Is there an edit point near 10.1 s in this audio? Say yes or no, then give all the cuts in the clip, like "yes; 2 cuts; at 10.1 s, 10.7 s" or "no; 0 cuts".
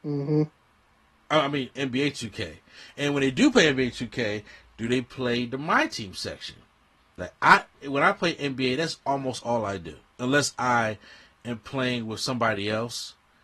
no; 2 cuts; at 1.8 s, 7.2 s